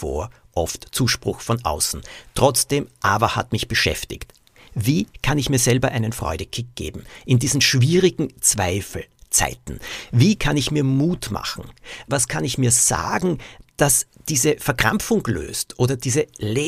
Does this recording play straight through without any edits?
no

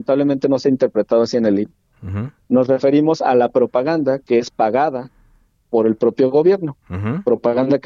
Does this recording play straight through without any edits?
yes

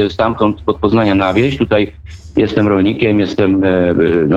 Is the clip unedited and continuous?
yes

